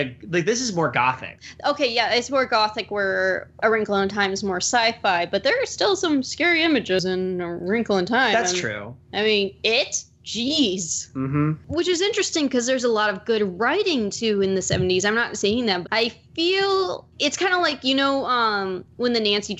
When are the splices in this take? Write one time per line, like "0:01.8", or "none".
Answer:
0:15.8